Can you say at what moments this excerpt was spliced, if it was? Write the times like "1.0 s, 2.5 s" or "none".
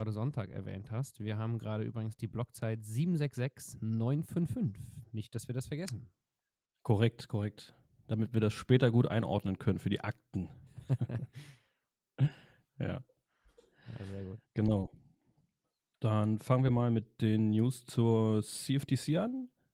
none